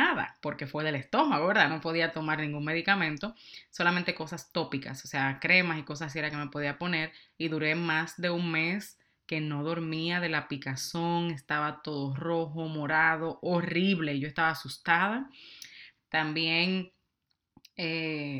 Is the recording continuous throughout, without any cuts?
no; 1 cut; at 16.0 s

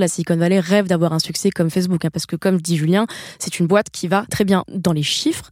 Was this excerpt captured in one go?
no; 1 cut; at 4.3 s

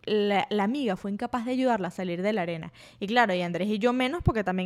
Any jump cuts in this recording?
no; 0 cuts

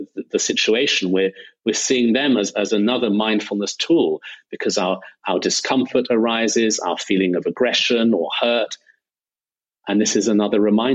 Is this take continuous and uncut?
yes; 0 cuts

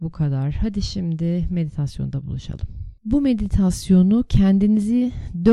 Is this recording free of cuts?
no; 1 cut; at 3.0 s

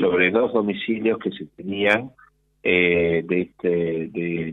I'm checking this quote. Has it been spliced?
no; 0 cuts

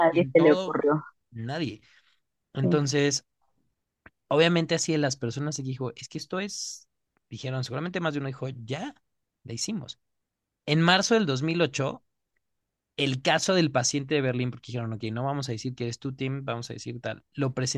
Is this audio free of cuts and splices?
yes; 0 cuts

